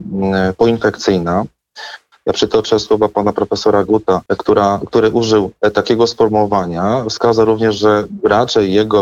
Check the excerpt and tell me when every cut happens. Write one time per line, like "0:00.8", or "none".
0:02.1
0:04.3